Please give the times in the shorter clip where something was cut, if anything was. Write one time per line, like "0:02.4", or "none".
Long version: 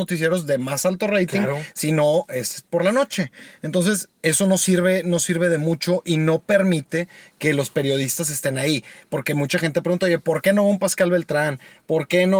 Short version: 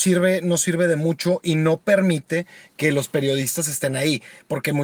none